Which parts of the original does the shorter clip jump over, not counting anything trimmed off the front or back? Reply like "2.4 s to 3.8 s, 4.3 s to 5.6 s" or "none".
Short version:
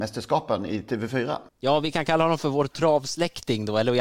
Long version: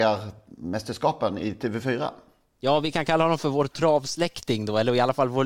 2.2 s to 2.5 s